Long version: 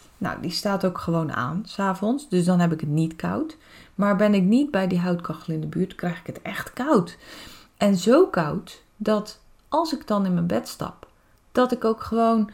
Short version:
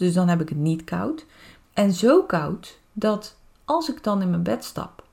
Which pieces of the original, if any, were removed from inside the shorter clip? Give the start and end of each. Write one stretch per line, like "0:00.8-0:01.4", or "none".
0:03.9-0:07.7